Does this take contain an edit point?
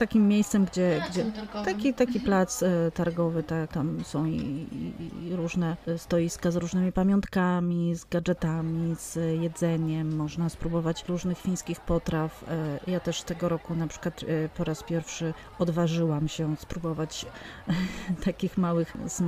no; 0 cuts

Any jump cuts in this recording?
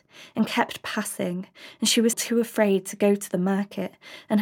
yes; 1 cut; at 2.1 s

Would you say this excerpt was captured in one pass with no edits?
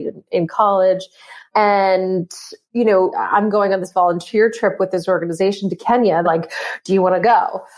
no; 2 cuts; at 3.1 s, 6.2 s

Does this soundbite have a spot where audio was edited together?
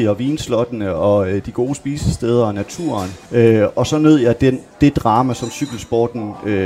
yes; 1 cut; at 3.2 s

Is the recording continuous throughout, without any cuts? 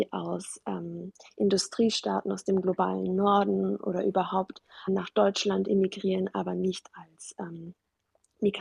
yes; 0 cuts

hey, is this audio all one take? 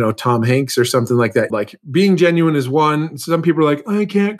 no; 1 cut; at 1.5 s

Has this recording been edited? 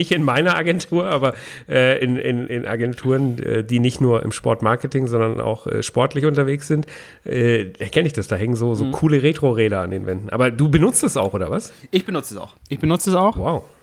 no; 0 cuts

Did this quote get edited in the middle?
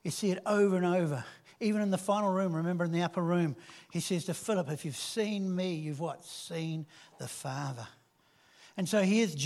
no; 0 cuts

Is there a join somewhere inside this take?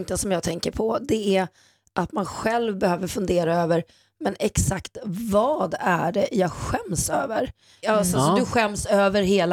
yes; 1 cut; at 7.8 s

